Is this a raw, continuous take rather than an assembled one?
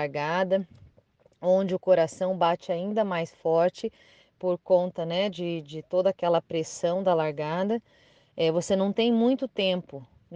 yes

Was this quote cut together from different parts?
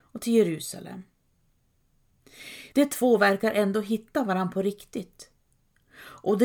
yes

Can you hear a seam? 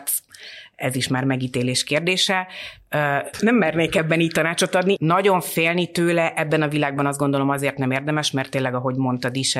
yes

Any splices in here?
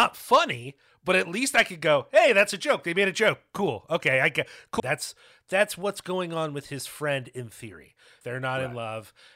yes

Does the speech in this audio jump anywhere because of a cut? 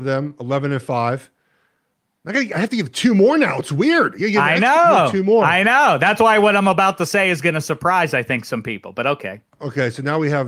no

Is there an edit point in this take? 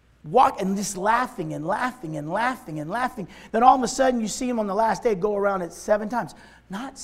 no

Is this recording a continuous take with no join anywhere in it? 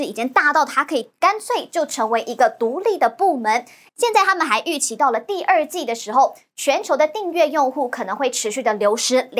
no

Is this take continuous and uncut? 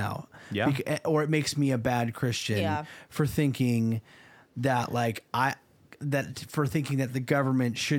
yes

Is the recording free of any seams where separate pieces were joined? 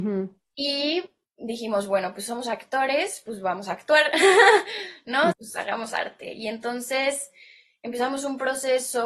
no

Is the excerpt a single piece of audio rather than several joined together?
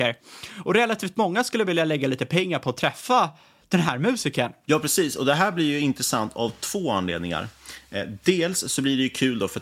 yes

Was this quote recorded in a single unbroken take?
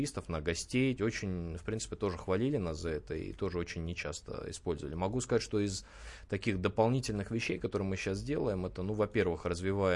no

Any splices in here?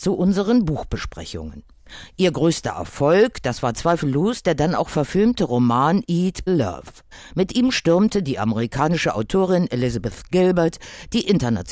yes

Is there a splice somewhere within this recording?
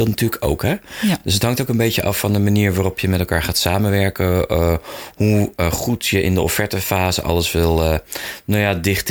no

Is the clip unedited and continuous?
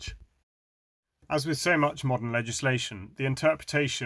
yes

